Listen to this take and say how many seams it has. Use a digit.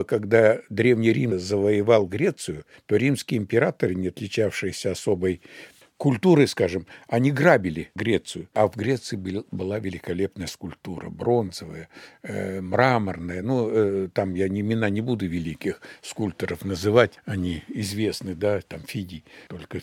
0